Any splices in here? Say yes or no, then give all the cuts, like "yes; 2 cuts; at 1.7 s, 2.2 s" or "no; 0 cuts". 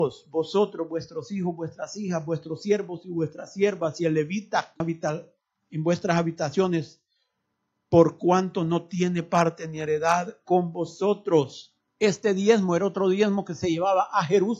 yes; 2 cuts; at 4.8 s, 11.9 s